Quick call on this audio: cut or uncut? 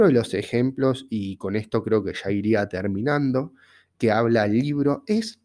cut